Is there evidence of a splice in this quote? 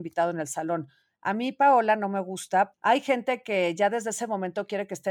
yes; 1 cut; at 2.7 s

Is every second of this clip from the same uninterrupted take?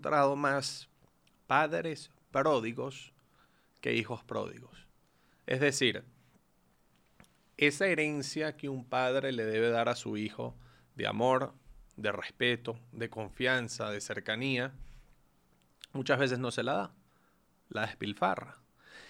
yes; 0 cuts

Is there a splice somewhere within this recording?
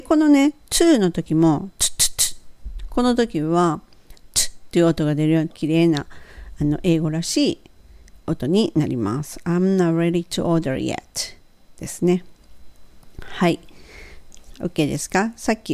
yes; 1 cut; at 5.5 s

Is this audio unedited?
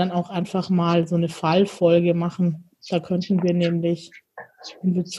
yes; 0 cuts

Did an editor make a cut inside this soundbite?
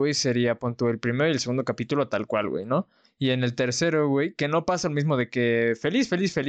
no; 0 cuts

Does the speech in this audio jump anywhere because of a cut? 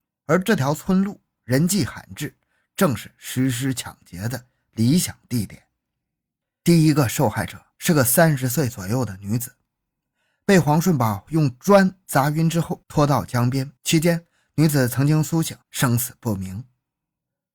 yes; 2 cuts; at 13.8 s, 15.6 s

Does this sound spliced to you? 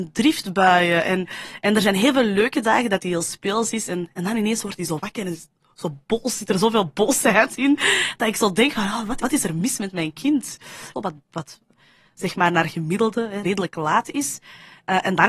yes; 3 cuts; at 9.2 s, 10.9 s, 13.4 s

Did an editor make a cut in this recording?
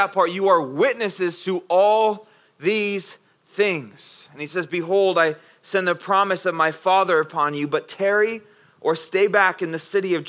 no; 0 cuts

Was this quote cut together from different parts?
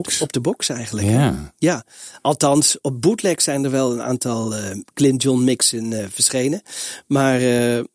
no; 0 cuts

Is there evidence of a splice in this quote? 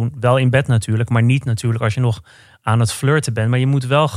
no; 0 cuts

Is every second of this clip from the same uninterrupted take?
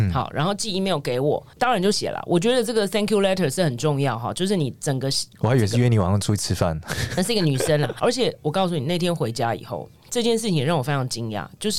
no; 3 cuts; at 1.9 s, 8.0 s, 10.0 s

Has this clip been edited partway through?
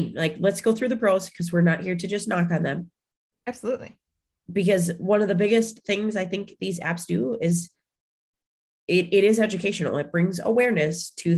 no; 0 cuts

